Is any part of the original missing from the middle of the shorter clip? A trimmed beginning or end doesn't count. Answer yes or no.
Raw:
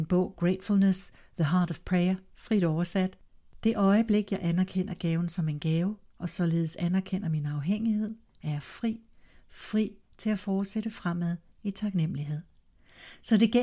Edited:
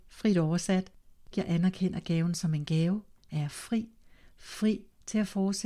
yes